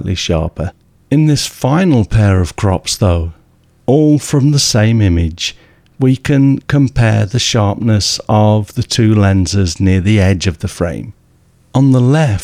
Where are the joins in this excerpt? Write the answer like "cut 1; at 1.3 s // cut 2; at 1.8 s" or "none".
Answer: none